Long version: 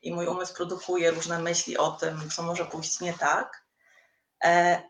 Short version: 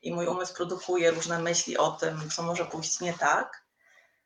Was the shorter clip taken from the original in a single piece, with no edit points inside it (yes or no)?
yes